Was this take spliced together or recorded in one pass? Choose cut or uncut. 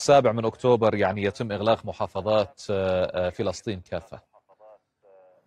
uncut